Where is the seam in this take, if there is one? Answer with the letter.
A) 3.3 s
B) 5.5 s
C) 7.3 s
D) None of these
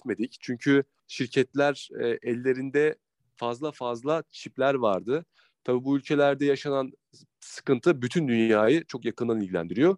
B